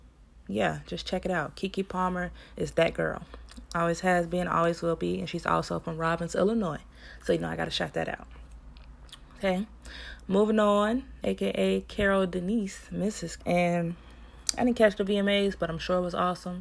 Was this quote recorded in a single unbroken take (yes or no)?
no